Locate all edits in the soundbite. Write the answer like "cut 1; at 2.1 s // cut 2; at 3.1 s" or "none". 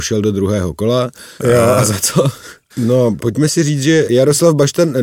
cut 1; at 1.4 s // cut 2; at 2.7 s